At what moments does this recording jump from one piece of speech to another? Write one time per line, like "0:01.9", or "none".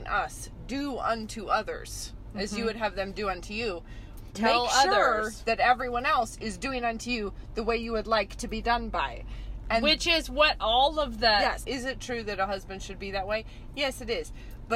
0:04.3
0:11.6